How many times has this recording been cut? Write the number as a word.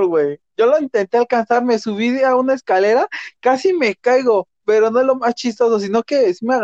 zero